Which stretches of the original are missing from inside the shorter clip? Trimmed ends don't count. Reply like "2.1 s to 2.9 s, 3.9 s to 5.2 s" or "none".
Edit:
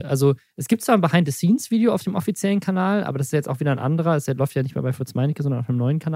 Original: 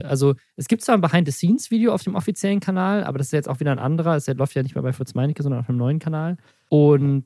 none